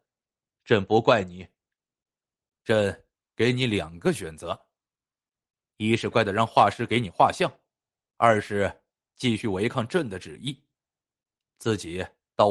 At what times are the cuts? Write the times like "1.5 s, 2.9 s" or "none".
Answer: 6.1 s, 8.1 s